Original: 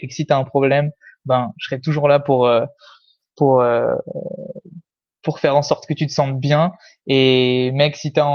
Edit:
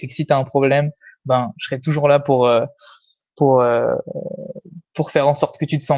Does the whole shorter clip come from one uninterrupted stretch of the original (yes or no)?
no